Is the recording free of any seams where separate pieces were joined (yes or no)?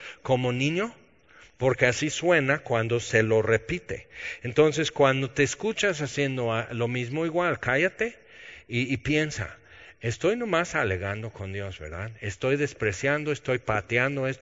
yes